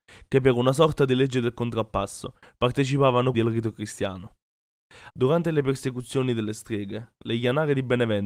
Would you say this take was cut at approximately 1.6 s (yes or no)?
no